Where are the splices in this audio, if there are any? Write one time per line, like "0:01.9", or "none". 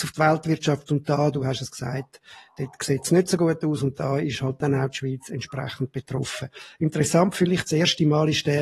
none